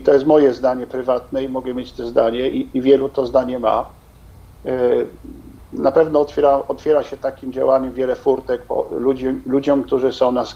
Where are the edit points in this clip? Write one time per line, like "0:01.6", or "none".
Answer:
0:02.5
0:05.6